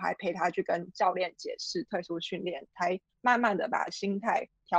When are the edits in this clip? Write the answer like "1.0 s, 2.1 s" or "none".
none